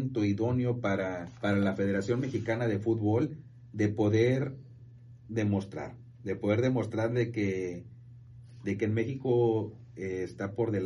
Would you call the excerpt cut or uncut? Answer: cut